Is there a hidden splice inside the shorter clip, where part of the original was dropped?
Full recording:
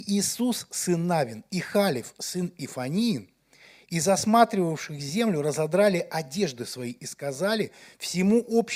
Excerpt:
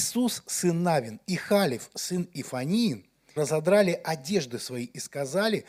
yes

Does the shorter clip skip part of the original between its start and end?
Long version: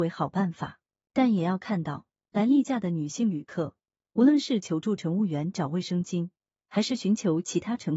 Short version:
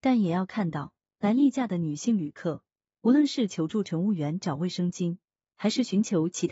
no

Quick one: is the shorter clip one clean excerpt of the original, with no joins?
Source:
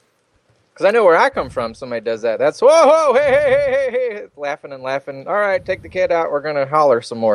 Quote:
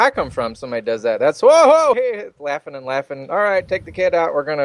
no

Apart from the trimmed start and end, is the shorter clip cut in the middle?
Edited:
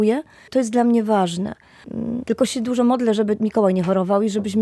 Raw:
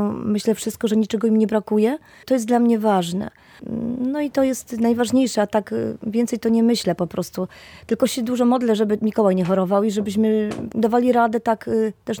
yes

